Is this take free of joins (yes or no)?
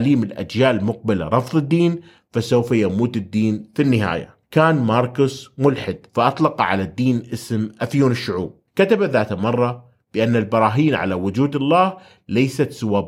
no